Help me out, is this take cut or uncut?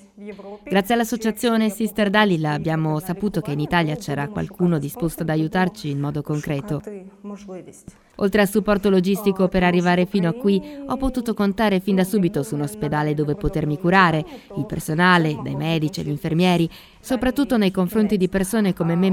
cut